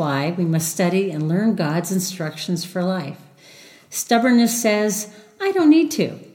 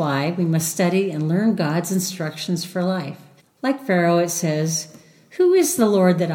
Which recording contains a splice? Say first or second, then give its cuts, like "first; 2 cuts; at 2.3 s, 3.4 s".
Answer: second; 1 cut; at 3.4 s